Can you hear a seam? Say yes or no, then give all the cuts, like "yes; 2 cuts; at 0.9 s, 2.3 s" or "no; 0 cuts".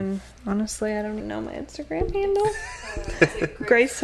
yes; 1 cut; at 1.2 s